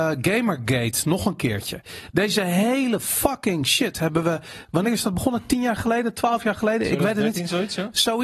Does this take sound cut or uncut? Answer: uncut